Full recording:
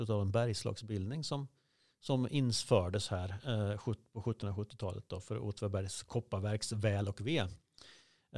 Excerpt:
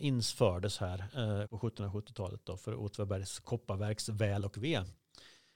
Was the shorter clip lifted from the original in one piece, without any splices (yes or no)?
no